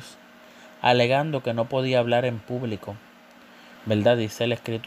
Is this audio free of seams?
no; 1 cut; at 3.8 s

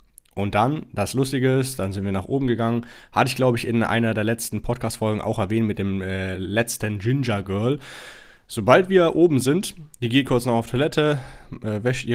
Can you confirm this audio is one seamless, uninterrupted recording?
yes; 0 cuts

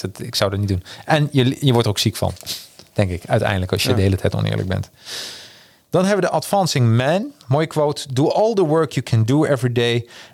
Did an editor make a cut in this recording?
no; 0 cuts

